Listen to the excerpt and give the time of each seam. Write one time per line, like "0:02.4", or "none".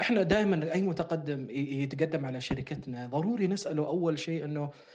none